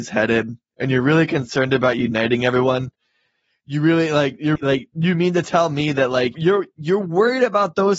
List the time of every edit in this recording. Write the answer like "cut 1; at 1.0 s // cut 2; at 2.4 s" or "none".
cut 1; at 4.6 s // cut 2; at 6.3 s